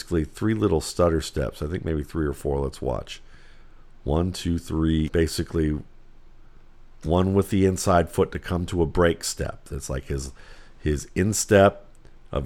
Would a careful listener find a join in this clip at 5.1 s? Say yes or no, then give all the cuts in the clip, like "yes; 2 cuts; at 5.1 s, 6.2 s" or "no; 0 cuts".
yes; 1 cut; at 5.1 s